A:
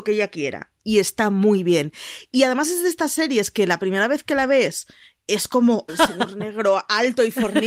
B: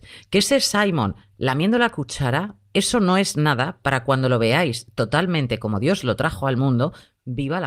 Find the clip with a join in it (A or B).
A